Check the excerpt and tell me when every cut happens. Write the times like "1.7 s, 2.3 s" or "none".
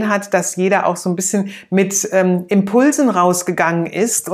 none